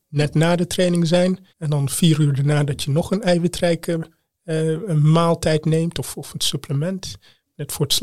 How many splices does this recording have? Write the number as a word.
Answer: one